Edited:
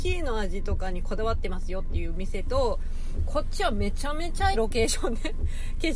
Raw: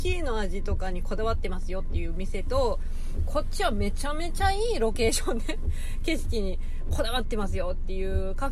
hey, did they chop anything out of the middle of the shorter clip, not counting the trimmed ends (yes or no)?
yes